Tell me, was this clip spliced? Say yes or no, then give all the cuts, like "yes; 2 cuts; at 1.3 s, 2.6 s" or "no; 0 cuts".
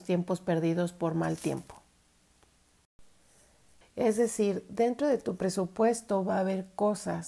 yes; 1 cut; at 3.8 s